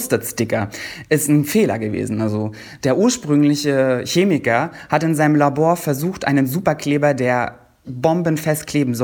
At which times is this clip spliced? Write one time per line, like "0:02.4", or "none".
0:07.8